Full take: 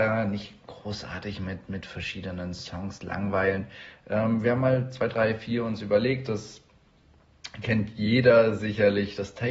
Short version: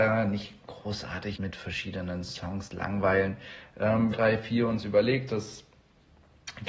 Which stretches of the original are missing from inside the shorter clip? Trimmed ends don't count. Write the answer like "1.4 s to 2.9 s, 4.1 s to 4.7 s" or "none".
1.4 s to 1.7 s, 4.4 s to 5.1 s